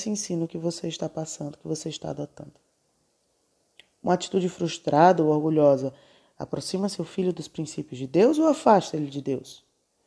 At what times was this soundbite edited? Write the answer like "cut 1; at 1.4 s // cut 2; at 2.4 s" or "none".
none